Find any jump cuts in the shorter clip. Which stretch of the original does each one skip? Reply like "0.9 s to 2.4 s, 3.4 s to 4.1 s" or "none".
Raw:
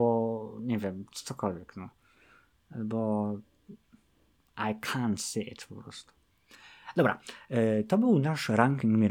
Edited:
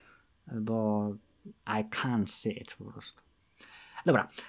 3.8 s to 4.5 s